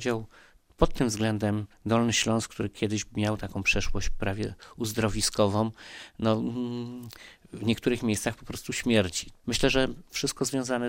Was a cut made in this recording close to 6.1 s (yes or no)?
no